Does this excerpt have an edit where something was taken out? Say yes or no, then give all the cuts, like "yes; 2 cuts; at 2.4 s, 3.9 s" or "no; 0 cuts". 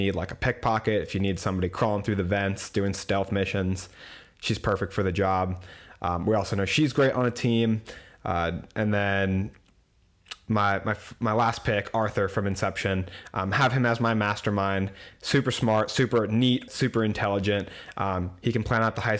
yes; 1 cut; at 16.7 s